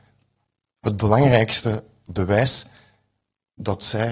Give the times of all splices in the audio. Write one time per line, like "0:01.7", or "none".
none